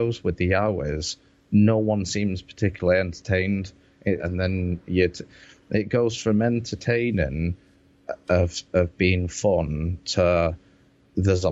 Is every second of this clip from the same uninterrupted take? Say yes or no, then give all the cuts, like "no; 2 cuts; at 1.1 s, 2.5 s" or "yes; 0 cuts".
no; 1 cut; at 4.2 s